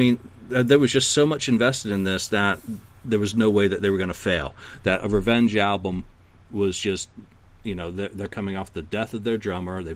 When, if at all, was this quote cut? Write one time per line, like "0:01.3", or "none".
none